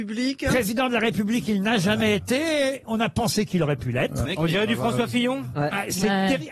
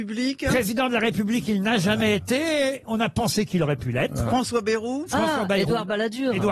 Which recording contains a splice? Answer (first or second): first